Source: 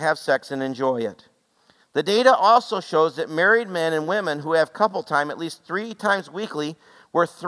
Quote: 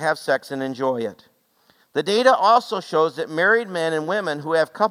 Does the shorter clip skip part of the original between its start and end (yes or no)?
no